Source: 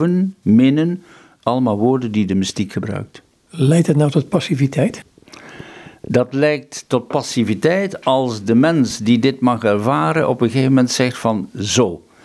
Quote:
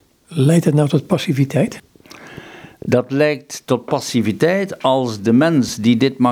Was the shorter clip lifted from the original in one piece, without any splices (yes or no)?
yes